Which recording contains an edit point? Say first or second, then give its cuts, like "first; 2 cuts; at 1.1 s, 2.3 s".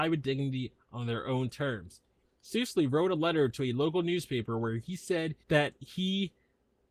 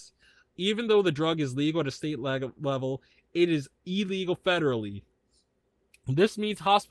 first; 2 cuts; at 2.3 s, 5.4 s